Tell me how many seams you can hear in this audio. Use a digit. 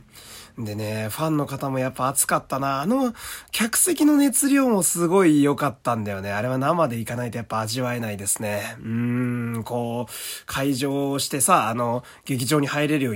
0